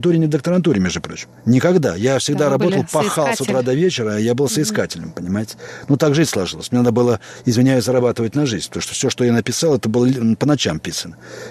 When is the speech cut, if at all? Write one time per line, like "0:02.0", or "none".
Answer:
0:01.4